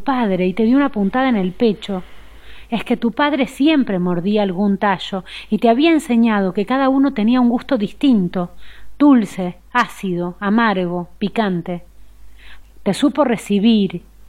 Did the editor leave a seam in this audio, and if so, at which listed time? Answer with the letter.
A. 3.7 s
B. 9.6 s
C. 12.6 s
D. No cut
C